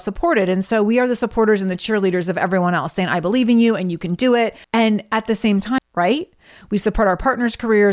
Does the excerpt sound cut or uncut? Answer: cut